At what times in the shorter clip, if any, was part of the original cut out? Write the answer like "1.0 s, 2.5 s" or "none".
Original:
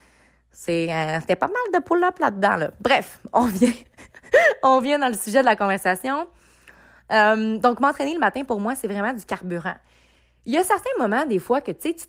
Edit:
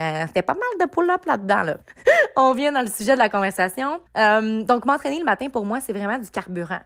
1.8 s, 4.1 s